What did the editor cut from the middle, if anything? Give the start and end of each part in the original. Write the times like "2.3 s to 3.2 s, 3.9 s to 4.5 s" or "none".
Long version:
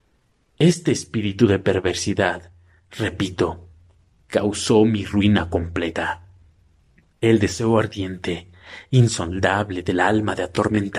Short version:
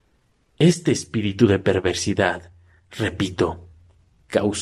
none